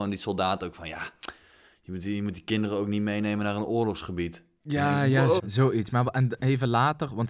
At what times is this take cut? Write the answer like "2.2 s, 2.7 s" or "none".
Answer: 5.4 s